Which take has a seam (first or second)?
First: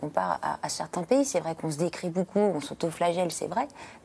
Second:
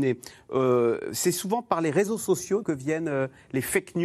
second